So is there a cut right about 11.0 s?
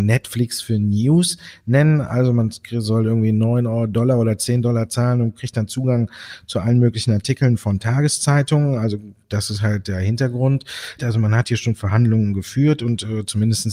yes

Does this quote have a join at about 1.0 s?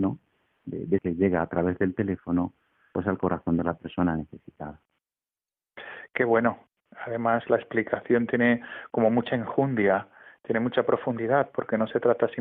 yes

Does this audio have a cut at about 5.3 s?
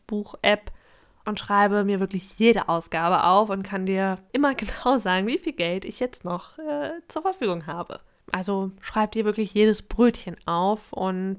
no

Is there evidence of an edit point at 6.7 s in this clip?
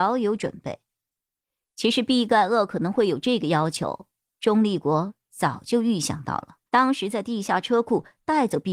yes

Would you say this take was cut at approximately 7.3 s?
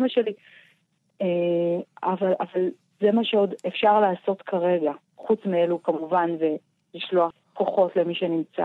yes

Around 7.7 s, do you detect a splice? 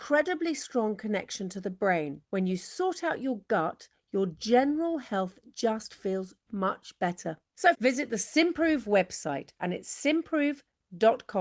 yes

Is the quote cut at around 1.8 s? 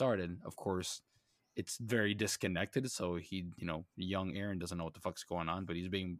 no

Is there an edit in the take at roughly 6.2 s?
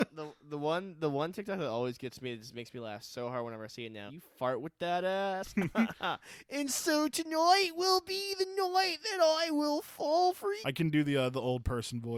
no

